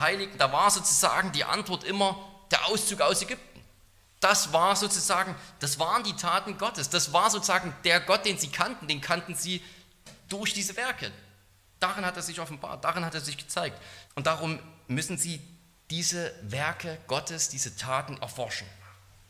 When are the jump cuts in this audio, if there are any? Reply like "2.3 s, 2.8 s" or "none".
14.1 s, 18.2 s